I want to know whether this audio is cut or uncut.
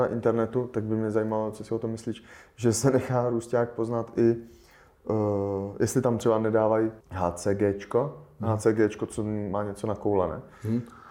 cut